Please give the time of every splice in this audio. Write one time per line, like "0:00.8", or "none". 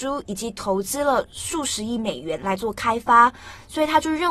none